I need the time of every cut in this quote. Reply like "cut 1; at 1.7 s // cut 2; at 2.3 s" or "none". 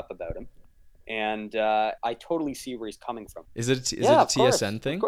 cut 1; at 2.0 s // cut 2; at 3.5 s